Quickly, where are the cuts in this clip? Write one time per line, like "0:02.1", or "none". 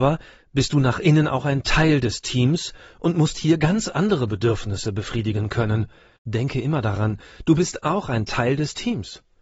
0:06.2